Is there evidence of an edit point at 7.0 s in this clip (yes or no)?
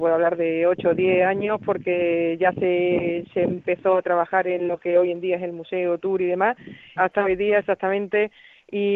yes